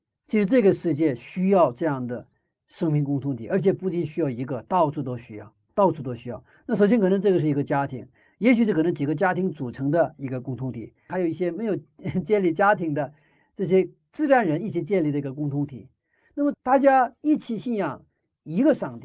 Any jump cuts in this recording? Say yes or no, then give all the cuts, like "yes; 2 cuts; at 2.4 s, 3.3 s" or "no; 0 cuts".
yes; 2 cuts; at 11.1 s, 16.5 s